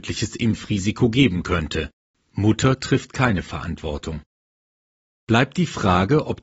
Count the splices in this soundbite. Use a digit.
1